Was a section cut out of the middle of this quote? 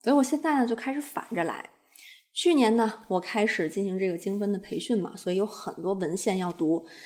no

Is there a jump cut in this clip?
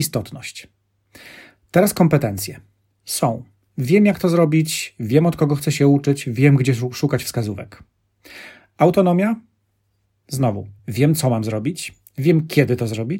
no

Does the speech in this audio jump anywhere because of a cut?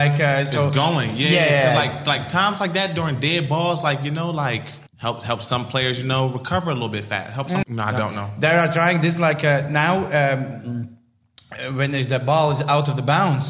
yes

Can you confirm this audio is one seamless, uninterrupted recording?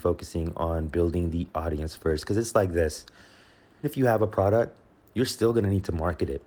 no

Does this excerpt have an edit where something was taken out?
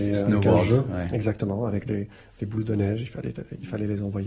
no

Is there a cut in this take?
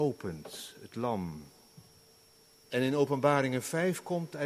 yes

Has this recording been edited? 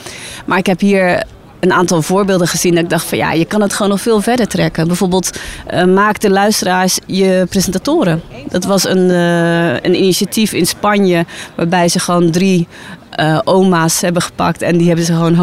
no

